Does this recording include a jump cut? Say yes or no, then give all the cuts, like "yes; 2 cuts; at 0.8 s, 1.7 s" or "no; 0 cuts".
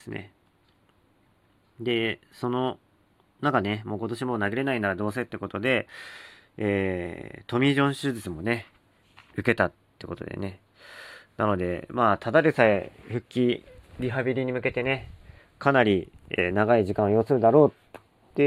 no; 0 cuts